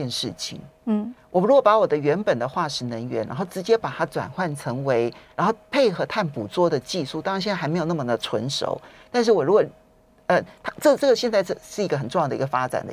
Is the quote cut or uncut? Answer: uncut